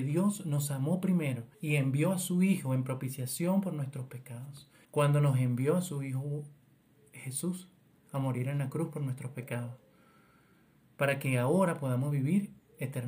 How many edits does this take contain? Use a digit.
2